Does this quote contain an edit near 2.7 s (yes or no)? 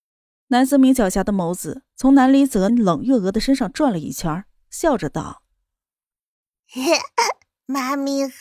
yes